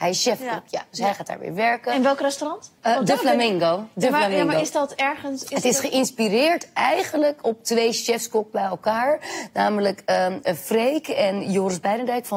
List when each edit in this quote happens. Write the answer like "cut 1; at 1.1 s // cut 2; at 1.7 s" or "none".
cut 1; at 2.8 s